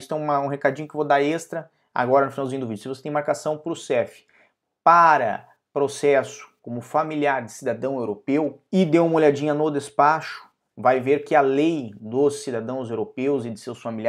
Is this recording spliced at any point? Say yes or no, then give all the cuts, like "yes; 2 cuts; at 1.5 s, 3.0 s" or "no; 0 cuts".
yes; 1 cut; at 8.7 s